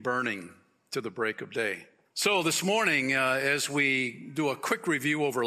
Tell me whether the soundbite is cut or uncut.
cut